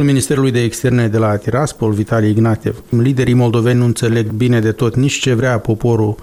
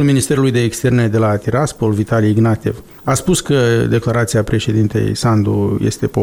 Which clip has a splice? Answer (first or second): first